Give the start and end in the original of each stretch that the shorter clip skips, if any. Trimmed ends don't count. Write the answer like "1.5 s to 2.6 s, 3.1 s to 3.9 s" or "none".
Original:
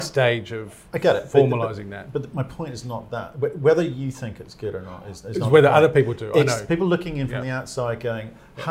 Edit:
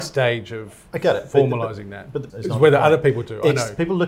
2.3 s to 5.2 s